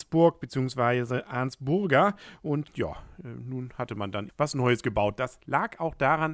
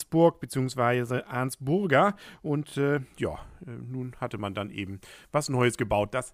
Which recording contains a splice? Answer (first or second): first